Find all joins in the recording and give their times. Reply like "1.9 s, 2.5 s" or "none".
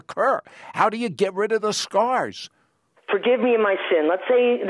3.0 s